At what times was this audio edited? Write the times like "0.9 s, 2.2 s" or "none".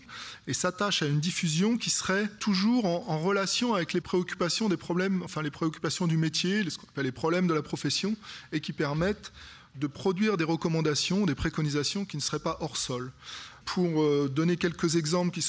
none